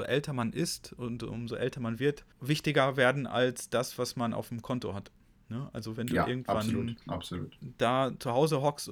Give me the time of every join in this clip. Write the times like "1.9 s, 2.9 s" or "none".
2.3 s, 7.0 s